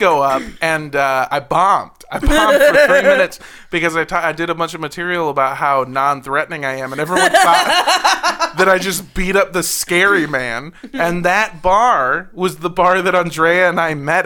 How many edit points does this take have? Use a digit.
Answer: 0